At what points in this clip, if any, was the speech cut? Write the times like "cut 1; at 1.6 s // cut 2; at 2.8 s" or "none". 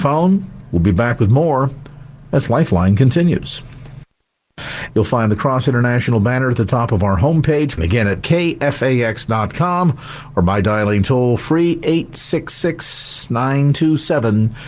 cut 1; at 4.9 s // cut 2; at 7.8 s